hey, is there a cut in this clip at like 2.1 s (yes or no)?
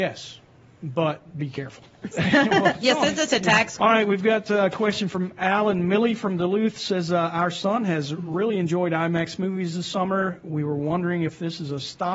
yes